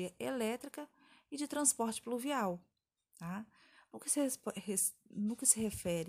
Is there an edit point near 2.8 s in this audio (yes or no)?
no